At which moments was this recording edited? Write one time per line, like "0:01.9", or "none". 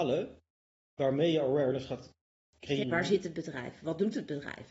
0:02.8